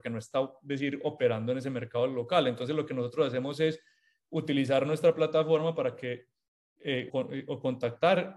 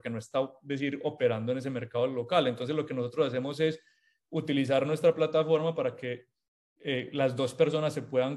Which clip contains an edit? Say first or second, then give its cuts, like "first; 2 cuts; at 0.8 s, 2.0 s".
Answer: first; 1 cut; at 7.1 s